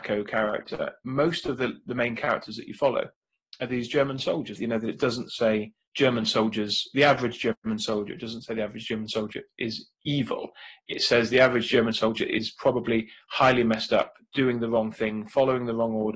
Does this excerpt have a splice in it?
yes; 1 cut; at 4.6 s

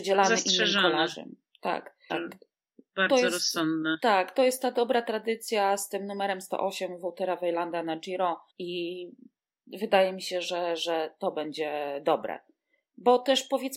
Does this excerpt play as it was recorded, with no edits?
no; 2 cuts; at 2.1 s, 8.5 s

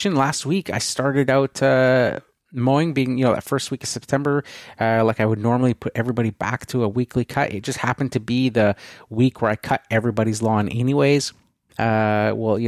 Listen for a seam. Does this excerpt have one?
yes; 1 cut; at 11.7 s

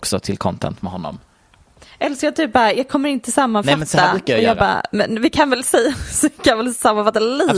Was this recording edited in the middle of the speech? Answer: no; 0 cuts

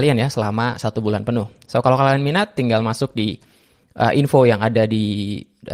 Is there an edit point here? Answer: no; 0 cuts

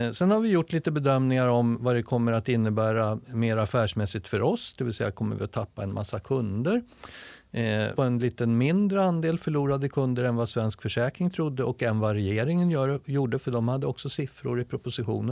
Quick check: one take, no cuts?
no; 1 cut; at 7.9 s

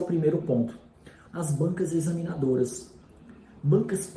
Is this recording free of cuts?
no; 1 cut; at 1.3 s

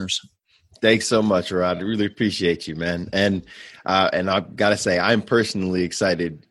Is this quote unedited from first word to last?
yes; 0 cuts

